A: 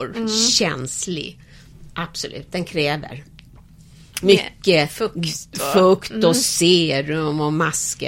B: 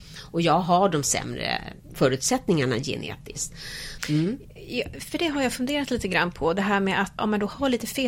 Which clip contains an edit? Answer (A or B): B